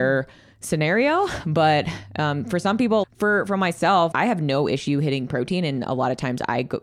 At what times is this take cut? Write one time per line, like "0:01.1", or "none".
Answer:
0:03.0
0:04.1